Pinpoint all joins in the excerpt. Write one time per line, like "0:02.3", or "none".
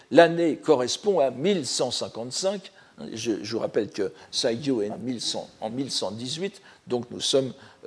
0:04.9